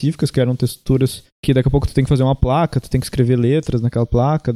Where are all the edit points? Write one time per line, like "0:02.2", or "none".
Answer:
0:01.3

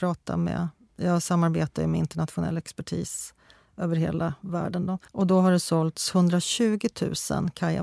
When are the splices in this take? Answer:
0:05.1

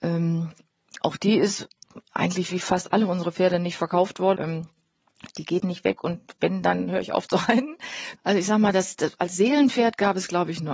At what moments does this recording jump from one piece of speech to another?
0:04.4
0:08.2

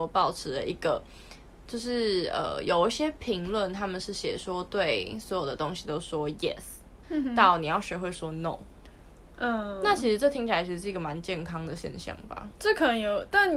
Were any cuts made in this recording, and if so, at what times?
0:07.0

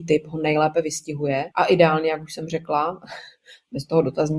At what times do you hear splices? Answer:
0:01.5

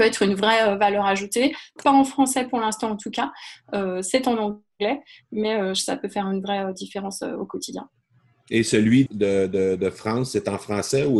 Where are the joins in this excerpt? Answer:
0:09.1

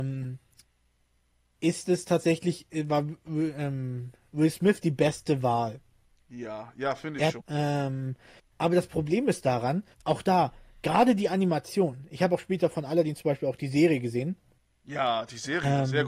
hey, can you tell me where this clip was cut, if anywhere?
0:07.4
0:09.9

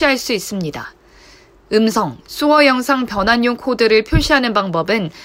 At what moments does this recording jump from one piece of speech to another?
none

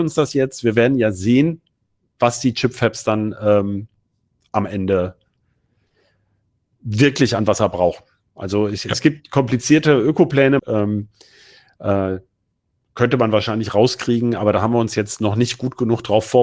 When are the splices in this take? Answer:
0:10.6

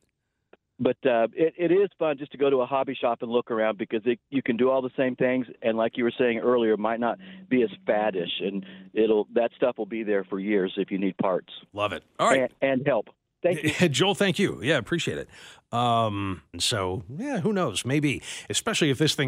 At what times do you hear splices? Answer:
0:16.5

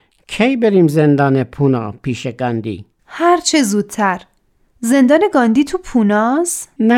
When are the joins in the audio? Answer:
none

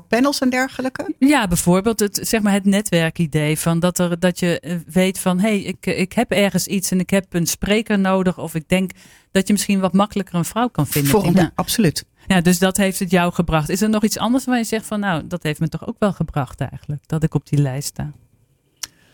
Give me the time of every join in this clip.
0:11.3

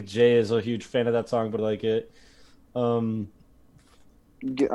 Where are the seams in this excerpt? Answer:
0:01.6

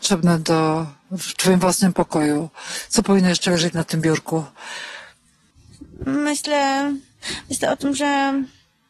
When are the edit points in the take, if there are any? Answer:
none

